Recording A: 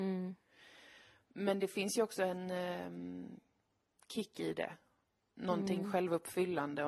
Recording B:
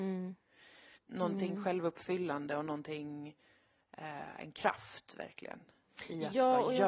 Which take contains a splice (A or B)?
B